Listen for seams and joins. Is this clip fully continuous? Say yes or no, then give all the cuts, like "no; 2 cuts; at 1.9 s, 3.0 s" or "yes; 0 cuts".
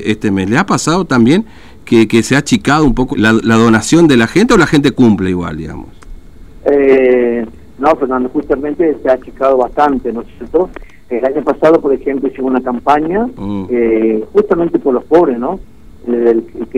no; 1 cut; at 3.1 s